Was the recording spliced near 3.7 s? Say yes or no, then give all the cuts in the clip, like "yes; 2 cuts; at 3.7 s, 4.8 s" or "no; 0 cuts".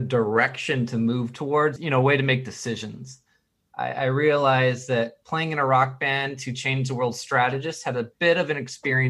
no; 1 cut; at 1.8 s